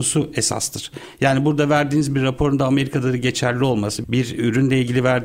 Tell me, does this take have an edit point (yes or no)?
yes